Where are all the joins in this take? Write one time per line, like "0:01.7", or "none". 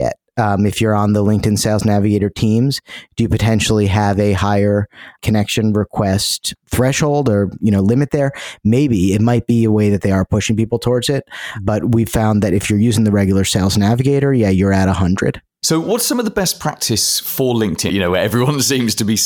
0:17.9